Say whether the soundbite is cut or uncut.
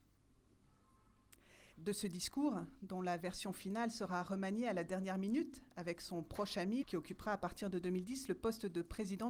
cut